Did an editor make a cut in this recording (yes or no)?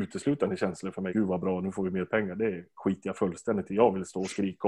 yes